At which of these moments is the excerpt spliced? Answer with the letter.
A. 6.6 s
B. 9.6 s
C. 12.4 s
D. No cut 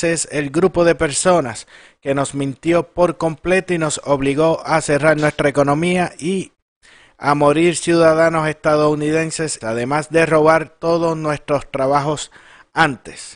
B